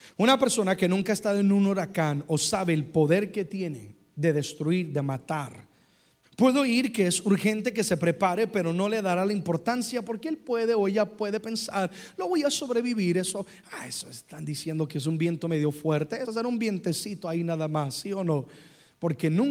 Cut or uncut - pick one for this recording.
cut